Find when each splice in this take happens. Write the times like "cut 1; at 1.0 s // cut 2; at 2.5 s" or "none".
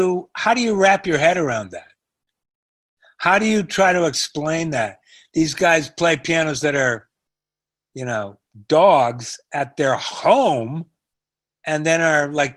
none